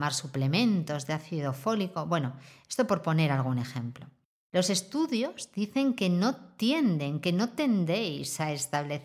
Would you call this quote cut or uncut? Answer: cut